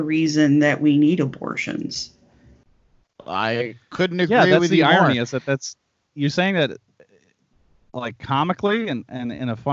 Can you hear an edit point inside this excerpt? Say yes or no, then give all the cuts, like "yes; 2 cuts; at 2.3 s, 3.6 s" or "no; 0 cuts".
yes; 1 cut; at 3.0 s